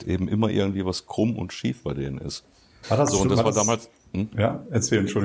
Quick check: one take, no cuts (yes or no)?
no